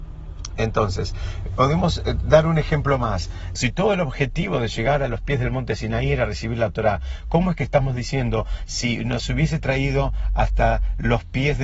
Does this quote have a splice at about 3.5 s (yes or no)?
yes